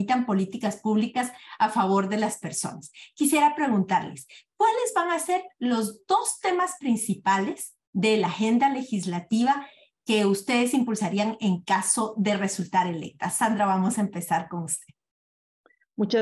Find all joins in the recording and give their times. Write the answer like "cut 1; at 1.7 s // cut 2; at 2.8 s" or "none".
none